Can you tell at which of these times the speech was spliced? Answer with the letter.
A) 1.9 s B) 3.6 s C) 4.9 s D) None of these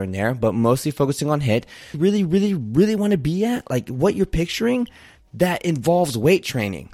A